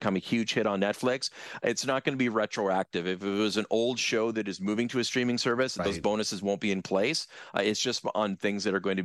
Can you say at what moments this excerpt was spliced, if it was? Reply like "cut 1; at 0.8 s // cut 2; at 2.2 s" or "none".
cut 1; at 5.8 s